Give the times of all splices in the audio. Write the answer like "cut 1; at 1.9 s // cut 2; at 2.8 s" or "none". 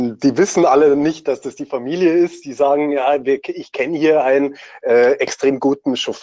none